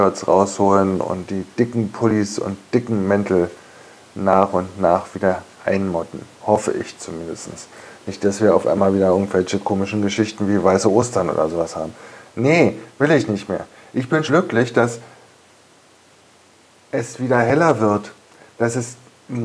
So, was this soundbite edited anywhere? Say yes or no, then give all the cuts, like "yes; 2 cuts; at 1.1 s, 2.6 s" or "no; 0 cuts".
yes; 1 cut; at 14.3 s